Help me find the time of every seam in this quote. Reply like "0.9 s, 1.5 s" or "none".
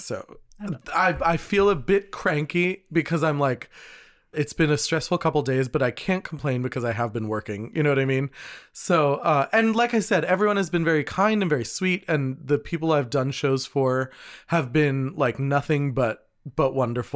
4.3 s